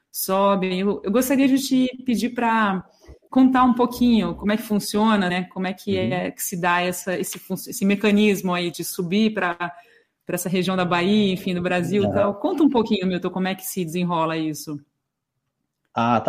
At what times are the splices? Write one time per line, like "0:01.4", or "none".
0:05.3